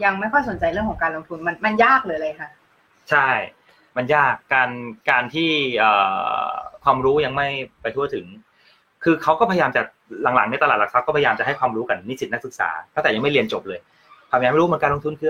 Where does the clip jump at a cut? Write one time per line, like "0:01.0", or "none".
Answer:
none